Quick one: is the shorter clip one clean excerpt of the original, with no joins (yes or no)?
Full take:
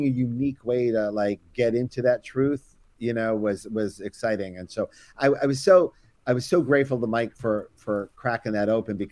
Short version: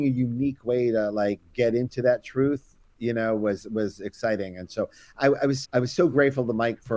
no